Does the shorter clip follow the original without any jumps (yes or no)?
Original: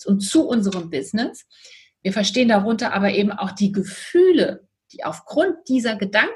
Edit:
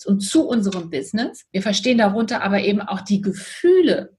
no